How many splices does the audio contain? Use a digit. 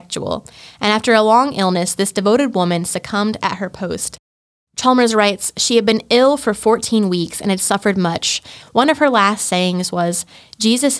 1